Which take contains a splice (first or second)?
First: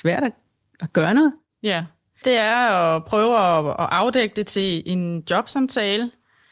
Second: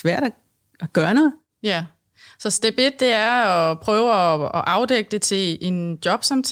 first